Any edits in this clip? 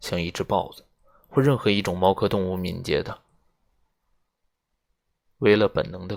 no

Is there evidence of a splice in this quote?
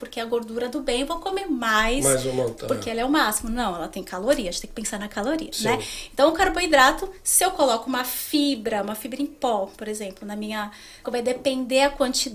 yes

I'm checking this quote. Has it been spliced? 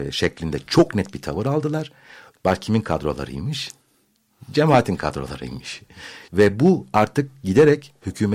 yes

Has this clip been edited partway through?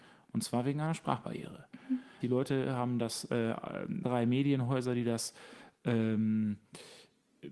yes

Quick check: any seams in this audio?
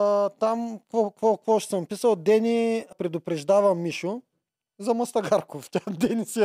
yes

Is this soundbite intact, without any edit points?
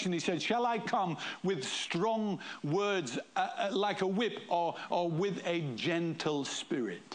yes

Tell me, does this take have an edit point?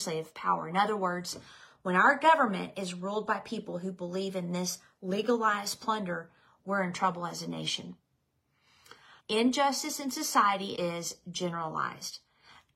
yes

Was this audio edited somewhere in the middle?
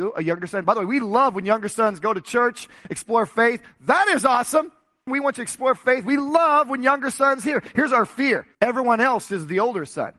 yes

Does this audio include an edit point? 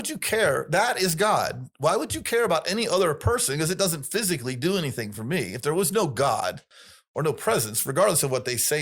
no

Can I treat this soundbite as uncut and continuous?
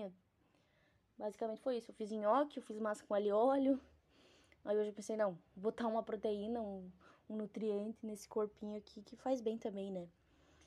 yes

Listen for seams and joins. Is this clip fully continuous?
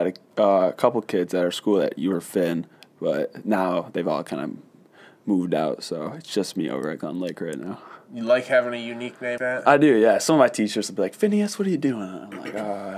no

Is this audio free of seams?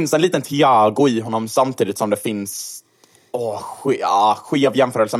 yes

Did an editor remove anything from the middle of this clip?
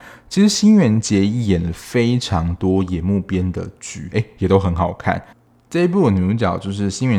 yes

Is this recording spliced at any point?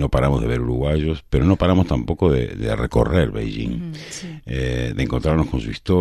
no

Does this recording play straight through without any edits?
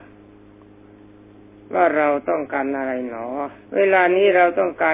no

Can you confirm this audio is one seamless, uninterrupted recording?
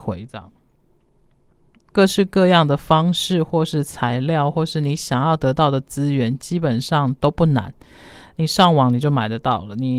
no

